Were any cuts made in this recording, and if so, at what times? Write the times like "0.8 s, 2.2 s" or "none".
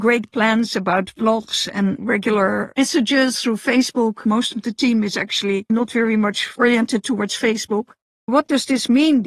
4.2 s, 8.0 s

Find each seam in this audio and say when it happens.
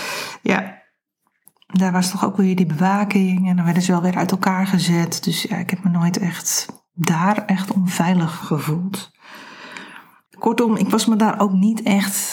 8.4 s, 10.3 s

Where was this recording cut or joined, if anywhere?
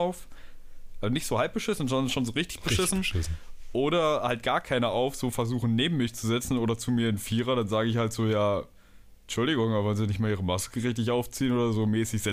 none

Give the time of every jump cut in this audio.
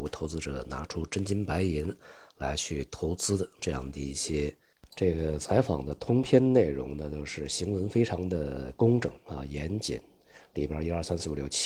4.9 s

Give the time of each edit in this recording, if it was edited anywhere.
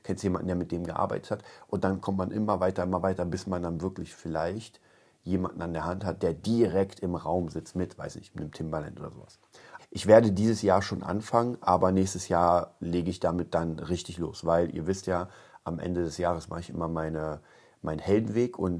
9.8 s

